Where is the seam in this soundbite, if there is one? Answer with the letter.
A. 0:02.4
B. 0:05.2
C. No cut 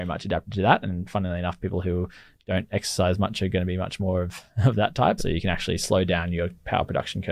B